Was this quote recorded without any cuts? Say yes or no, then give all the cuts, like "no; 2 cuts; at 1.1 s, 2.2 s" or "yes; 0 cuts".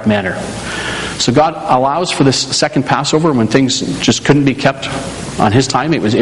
yes; 0 cuts